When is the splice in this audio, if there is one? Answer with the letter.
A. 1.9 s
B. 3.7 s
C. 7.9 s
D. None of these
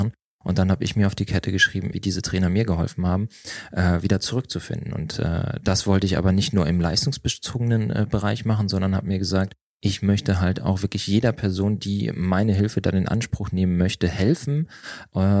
A